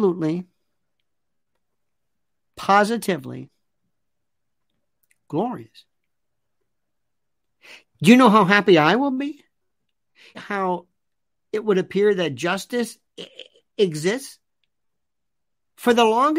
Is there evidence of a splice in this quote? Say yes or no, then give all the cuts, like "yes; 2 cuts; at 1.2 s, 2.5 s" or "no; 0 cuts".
yes; 2 cuts; at 7.8 s, 10.3 s